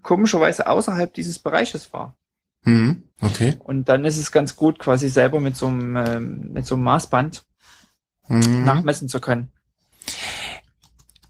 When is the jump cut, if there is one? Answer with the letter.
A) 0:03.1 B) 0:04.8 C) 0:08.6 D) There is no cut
A